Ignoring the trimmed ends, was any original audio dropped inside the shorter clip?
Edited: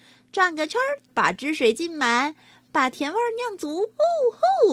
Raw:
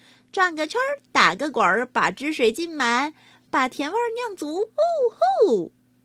yes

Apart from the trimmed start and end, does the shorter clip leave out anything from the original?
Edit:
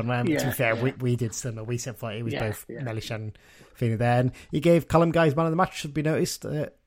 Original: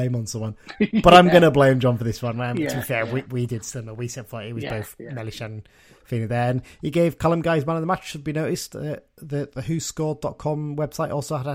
no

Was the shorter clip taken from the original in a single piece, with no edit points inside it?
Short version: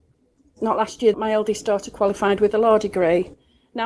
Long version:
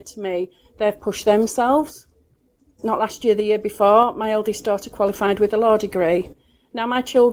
no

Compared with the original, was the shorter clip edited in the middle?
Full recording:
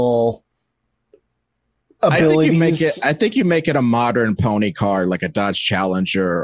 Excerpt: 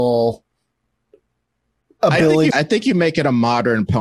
yes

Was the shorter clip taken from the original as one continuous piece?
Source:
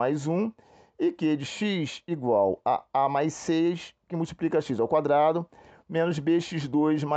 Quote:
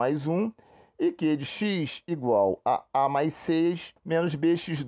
no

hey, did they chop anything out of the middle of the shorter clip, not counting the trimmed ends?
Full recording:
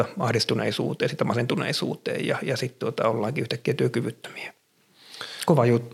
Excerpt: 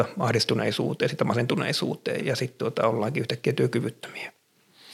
yes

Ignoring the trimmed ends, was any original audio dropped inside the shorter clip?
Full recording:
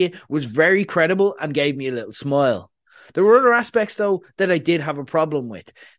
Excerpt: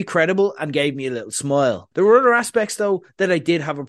yes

